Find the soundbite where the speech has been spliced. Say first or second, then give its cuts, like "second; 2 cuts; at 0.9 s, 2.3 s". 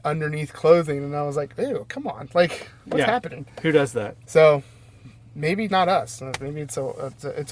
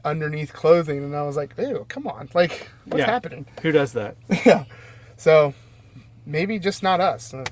first; 2 cuts; at 4.2 s, 5.7 s